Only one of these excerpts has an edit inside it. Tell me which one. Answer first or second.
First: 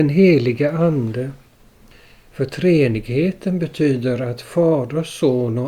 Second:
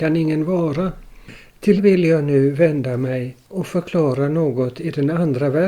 second